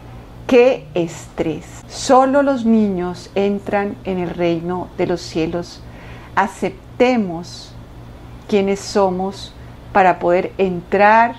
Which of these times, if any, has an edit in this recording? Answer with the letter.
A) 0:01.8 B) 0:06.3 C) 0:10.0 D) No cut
D